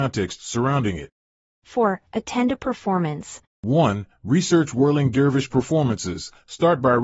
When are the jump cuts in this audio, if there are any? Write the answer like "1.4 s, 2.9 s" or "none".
3.4 s